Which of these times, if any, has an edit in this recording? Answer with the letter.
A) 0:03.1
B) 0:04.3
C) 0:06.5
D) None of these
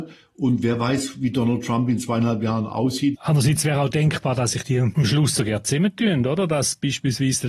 A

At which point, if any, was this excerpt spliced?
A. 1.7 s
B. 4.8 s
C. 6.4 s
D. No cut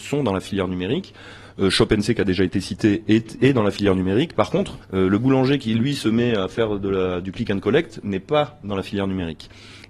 B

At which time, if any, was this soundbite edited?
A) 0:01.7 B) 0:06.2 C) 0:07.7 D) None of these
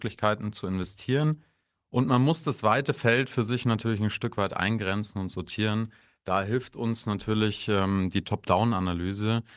D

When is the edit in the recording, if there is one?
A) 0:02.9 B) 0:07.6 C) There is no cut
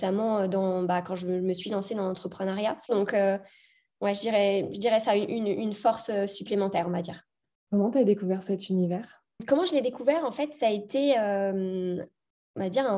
A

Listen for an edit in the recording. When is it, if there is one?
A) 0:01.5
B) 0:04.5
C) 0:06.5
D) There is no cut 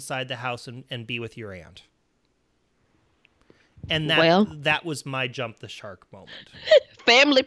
D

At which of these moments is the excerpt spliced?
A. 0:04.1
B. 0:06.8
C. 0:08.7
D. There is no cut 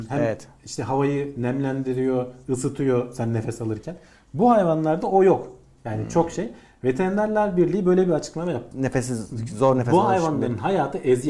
C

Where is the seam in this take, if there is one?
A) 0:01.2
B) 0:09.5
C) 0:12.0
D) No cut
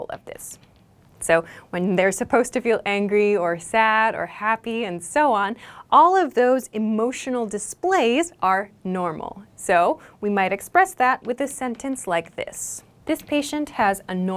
A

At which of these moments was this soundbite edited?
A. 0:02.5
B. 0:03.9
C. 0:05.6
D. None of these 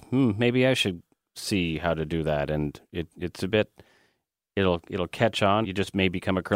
C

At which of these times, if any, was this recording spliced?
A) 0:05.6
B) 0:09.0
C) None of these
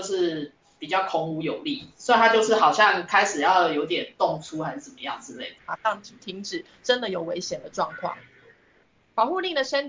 A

